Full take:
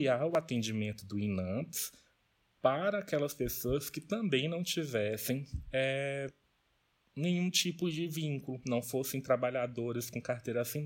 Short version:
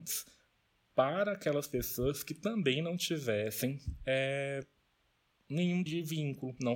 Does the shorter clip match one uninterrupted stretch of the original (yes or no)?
no